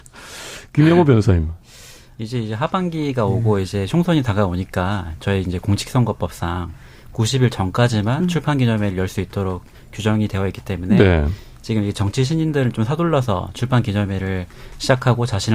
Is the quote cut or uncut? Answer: uncut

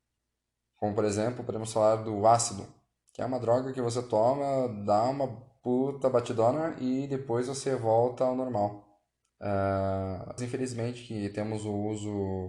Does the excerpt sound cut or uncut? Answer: cut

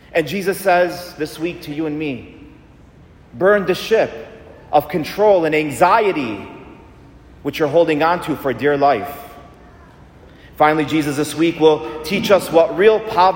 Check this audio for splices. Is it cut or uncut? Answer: uncut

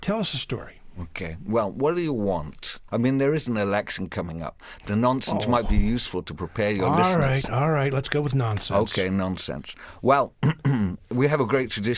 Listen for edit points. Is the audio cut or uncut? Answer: cut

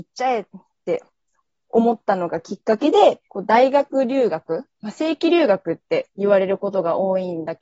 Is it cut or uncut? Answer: cut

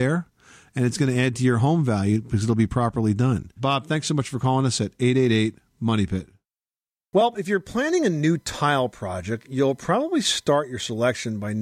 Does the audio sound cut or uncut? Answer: uncut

